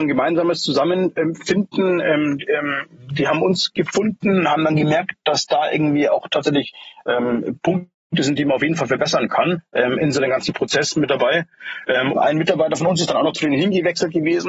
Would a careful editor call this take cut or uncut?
cut